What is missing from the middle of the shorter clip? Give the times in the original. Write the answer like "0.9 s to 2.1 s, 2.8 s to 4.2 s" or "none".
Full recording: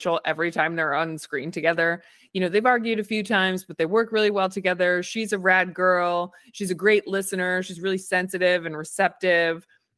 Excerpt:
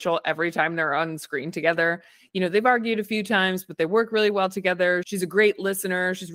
5.0 s to 6.5 s

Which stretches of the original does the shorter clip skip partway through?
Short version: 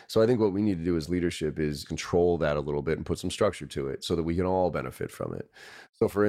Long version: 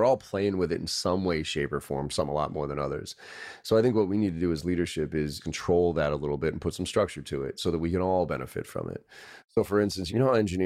none

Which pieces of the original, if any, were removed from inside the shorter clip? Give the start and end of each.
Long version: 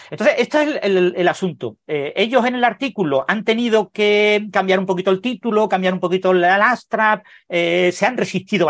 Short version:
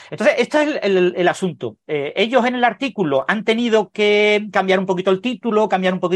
none

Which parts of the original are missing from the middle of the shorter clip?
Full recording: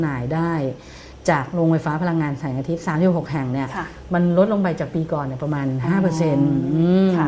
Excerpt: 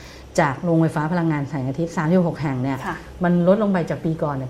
none

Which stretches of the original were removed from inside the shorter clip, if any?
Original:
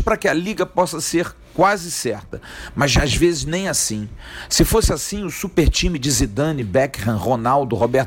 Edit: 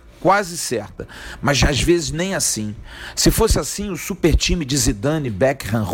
none

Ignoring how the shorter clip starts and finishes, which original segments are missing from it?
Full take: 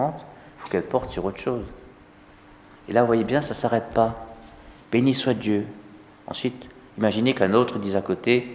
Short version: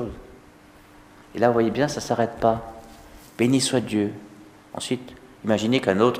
none

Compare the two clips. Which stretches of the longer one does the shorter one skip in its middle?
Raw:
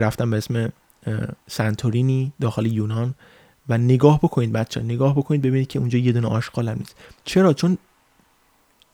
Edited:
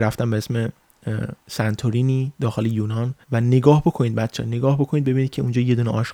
3.2 s to 3.6 s

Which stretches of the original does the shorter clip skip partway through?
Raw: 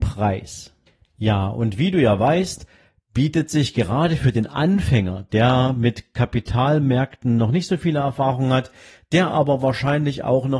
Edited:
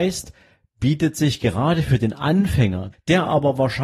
5.3 s to 9.0 s

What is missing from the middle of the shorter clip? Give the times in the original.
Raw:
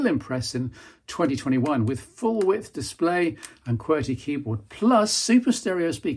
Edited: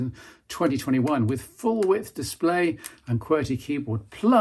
none

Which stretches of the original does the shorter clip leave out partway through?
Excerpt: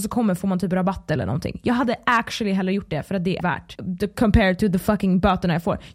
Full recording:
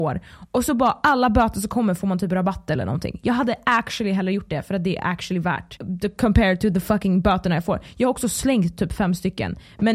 5.0 s to 5.4 s

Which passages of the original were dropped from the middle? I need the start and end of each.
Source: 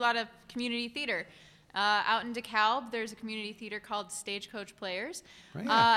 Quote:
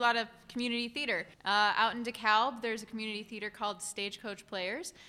1.3 s to 1.6 s

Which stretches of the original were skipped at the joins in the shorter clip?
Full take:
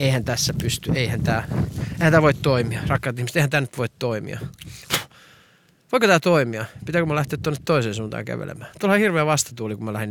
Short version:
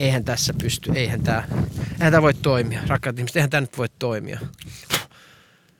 none

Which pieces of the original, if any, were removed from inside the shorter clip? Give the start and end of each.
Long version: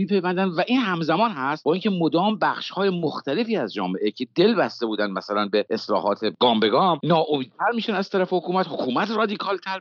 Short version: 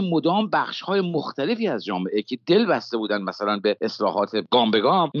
none

